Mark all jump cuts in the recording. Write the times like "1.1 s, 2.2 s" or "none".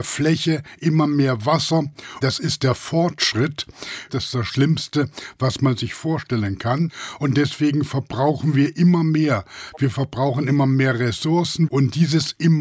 2.2 s, 4.1 s, 11.7 s